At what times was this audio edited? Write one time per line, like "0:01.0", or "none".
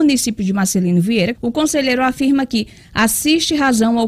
0:01.3